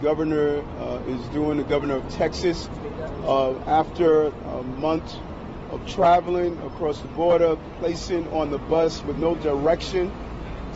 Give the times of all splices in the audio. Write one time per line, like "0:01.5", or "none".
none